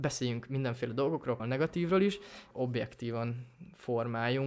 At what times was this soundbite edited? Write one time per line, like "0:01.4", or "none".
0:01.4
0:02.5